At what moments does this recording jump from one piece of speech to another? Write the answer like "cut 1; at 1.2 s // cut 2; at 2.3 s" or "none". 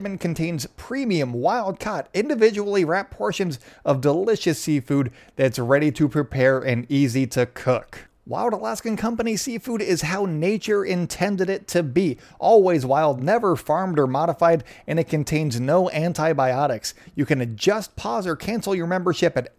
none